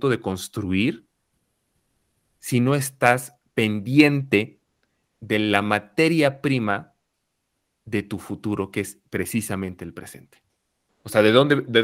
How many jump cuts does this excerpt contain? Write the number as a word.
one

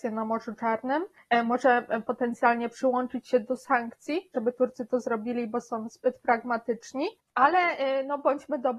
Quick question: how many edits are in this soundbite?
two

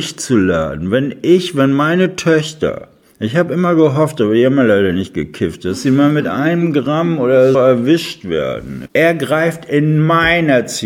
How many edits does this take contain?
two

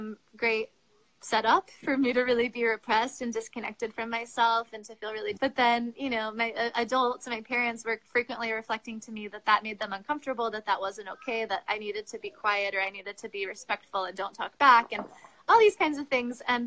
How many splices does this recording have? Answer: one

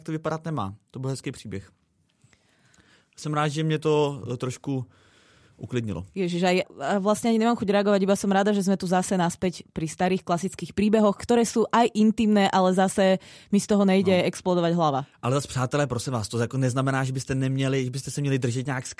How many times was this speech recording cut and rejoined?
one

